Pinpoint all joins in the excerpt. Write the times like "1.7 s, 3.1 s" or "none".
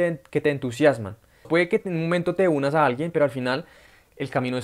1.4 s